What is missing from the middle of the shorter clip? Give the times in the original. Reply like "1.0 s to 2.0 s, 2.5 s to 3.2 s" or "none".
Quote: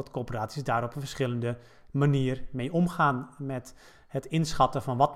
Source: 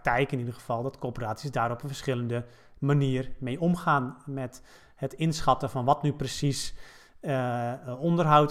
none